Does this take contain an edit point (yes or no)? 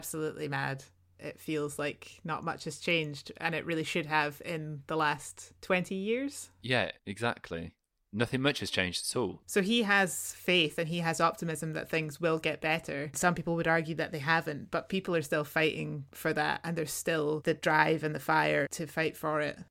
yes